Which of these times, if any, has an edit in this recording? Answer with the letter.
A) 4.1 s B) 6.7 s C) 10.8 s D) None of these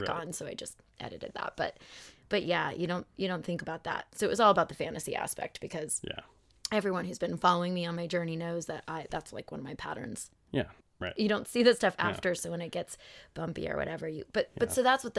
C